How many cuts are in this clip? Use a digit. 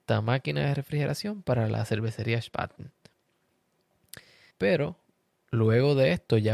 1